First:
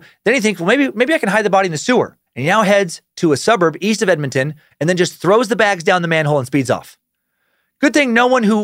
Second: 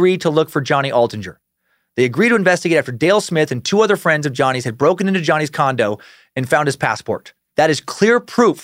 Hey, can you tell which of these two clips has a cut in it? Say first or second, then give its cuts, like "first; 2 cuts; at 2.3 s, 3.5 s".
first; 2 cuts; at 2.3 s, 4.7 s